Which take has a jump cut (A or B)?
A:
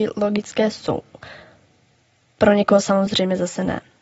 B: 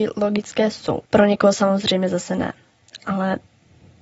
B